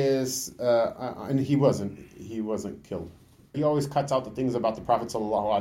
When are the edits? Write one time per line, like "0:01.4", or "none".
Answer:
0:03.5